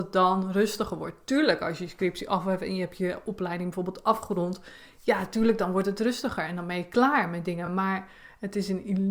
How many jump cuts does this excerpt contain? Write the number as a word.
zero